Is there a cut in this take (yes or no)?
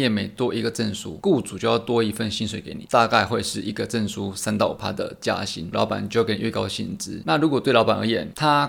yes